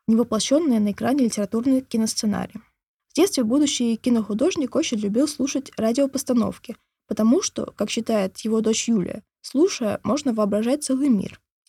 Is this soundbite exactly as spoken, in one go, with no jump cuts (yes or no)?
no